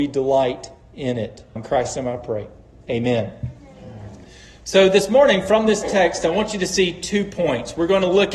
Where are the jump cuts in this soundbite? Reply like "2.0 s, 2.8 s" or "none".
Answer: 1.6 s